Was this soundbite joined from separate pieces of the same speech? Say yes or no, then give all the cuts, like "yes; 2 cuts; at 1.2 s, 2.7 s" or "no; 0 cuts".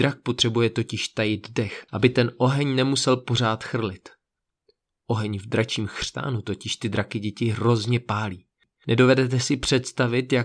yes; 1 cut; at 1.9 s